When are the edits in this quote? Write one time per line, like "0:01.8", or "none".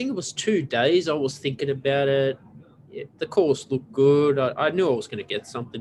none